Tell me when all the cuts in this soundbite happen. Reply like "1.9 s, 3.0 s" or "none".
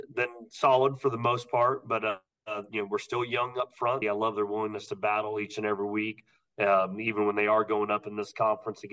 4.0 s